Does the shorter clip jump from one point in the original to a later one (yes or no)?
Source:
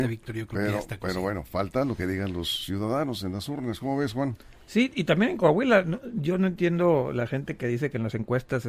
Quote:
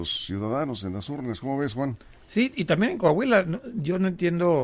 no